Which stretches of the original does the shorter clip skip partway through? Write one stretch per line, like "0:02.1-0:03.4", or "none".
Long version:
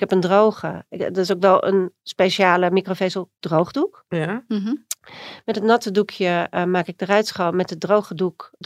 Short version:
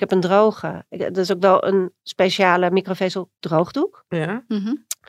none